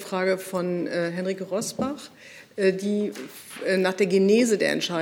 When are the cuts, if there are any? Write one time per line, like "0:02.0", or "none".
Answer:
none